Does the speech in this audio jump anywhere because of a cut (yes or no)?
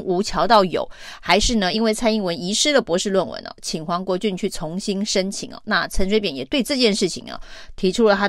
no